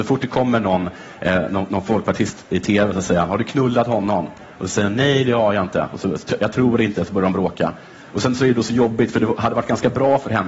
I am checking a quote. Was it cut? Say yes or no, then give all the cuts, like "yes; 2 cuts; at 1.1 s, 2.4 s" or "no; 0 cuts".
no; 0 cuts